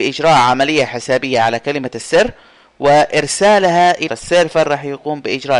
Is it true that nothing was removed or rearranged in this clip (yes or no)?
no